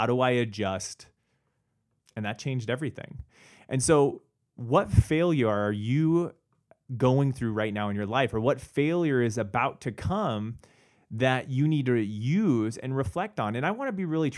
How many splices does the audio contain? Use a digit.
1